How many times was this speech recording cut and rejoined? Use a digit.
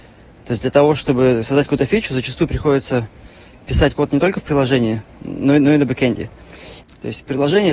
1